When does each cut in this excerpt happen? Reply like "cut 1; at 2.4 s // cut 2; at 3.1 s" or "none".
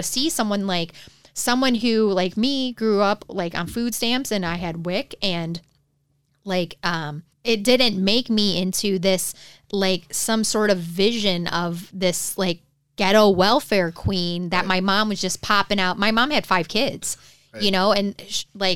cut 1; at 7.3 s